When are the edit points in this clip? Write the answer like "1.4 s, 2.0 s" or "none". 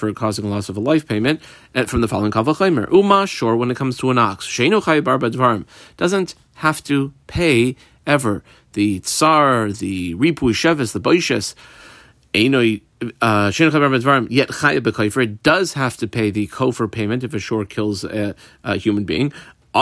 none